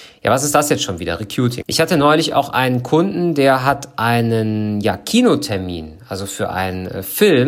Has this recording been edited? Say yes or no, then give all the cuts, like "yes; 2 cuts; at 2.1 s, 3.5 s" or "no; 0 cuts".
yes; 1 cut; at 1.6 s